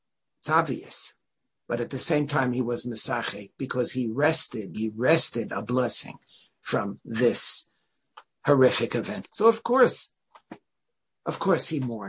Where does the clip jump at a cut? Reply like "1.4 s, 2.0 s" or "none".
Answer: 4.7 s, 9.2 s